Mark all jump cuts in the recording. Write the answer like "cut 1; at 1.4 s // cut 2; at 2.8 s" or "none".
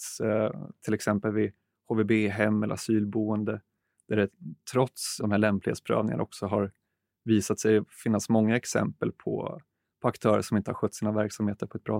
cut 1; at 5.2 s